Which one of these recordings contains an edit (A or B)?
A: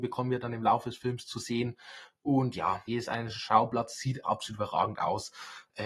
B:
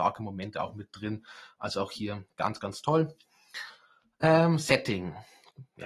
A